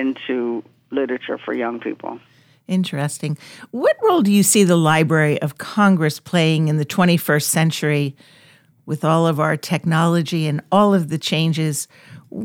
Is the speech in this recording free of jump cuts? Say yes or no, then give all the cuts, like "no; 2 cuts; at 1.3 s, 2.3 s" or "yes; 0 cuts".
yes; 0 cuts